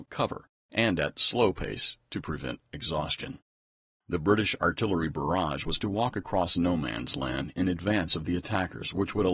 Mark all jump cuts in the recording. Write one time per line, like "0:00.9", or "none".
0:04.0